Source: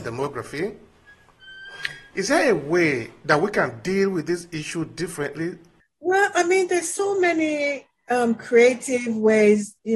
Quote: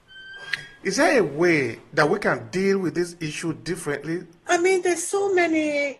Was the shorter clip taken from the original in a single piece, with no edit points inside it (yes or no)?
no